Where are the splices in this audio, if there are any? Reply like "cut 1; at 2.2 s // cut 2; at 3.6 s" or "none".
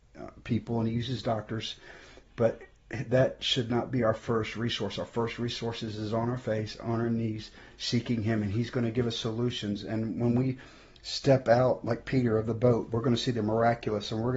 none